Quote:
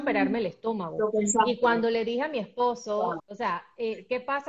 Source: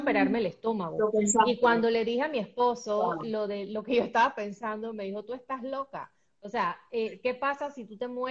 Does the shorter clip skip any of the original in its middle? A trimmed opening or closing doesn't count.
yes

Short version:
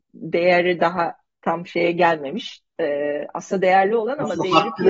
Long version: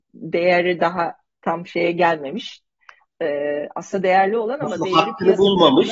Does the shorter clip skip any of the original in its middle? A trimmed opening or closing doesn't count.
yes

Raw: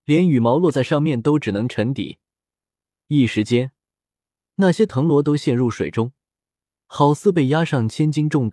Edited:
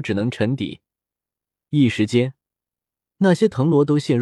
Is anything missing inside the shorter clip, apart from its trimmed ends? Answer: no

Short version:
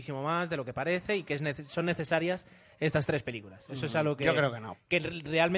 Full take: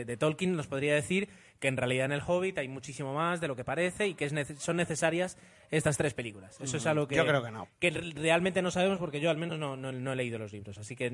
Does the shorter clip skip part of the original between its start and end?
no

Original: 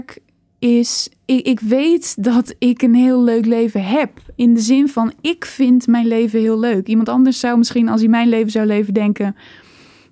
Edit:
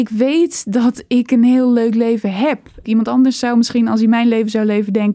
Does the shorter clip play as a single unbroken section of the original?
no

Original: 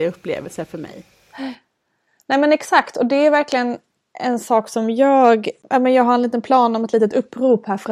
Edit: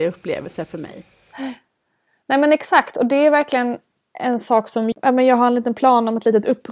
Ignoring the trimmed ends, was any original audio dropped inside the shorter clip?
yes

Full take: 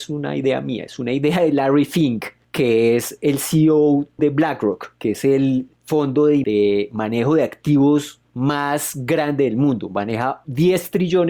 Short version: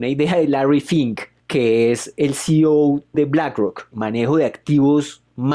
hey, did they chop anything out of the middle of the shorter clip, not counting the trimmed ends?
yes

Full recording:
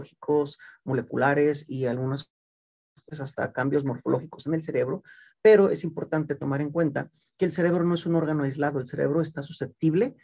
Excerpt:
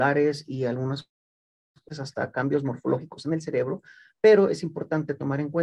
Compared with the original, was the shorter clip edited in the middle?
no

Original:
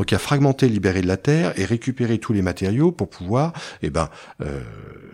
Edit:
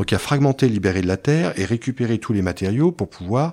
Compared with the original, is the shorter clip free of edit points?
yes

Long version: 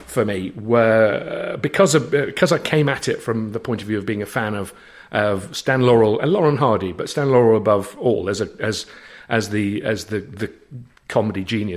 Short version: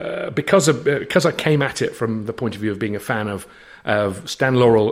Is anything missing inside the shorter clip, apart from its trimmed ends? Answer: no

